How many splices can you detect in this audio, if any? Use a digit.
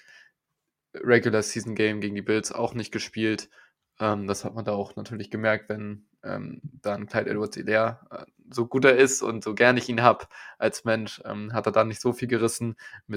0